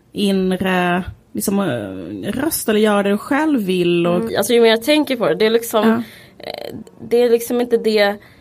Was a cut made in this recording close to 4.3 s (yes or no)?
yes